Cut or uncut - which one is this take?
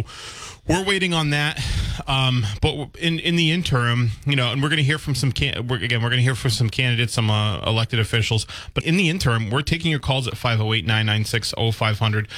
cut